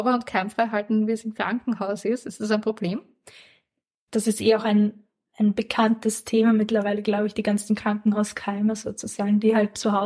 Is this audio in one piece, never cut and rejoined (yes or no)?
no